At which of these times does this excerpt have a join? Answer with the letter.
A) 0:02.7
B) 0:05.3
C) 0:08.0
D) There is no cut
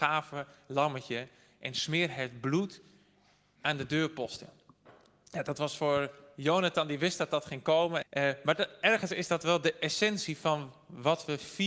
C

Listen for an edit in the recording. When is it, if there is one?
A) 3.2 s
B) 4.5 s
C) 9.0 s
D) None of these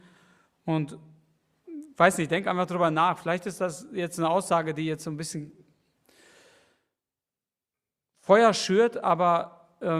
D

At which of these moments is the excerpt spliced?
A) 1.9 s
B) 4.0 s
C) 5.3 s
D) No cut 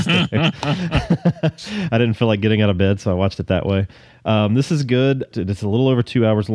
C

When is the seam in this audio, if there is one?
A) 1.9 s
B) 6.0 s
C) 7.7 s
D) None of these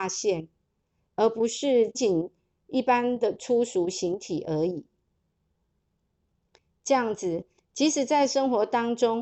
A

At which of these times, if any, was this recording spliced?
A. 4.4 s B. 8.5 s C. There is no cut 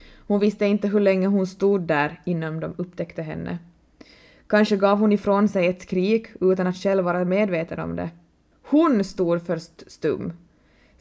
B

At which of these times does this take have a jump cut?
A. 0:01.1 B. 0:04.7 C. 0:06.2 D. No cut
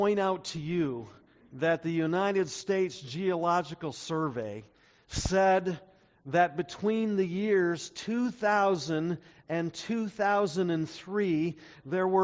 D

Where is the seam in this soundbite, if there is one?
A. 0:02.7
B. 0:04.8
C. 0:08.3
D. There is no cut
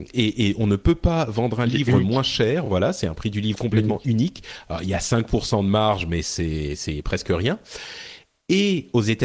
D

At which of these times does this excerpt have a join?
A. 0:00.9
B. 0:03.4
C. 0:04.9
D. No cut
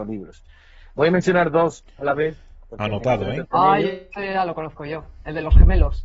B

